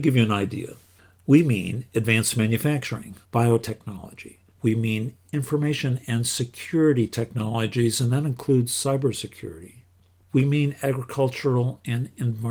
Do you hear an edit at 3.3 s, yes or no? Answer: yes